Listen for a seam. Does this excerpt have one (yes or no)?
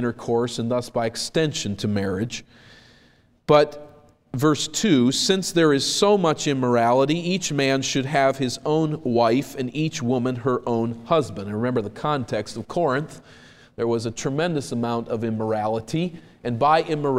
no